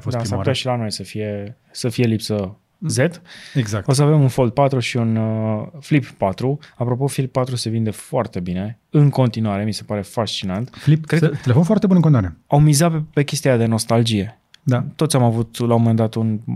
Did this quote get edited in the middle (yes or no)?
no